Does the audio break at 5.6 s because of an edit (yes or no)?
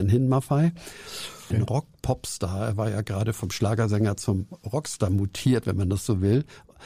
no